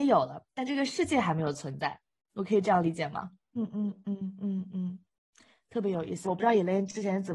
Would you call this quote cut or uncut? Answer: cut